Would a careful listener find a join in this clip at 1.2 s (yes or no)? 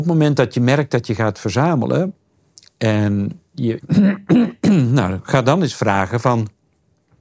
no